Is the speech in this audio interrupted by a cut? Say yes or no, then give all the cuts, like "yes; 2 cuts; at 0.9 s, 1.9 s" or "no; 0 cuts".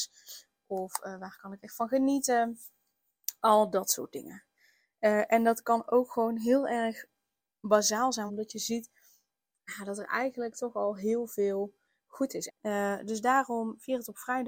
yes; 2 cuts; at 8.3 s, 12.5 s